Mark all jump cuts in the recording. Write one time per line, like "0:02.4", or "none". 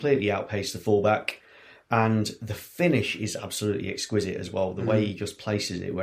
none